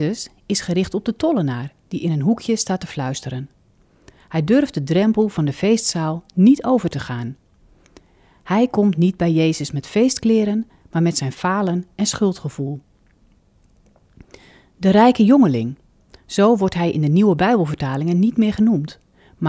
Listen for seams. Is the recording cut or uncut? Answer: uncut